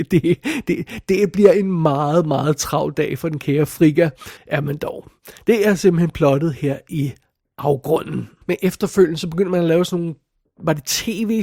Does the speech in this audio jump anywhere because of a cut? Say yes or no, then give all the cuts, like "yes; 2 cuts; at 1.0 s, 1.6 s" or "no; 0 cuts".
yes; 2 cuts; at 4.4 s, 8.4 s